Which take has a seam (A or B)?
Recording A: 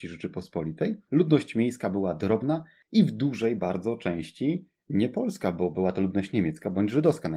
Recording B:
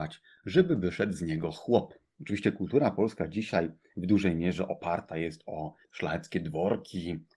B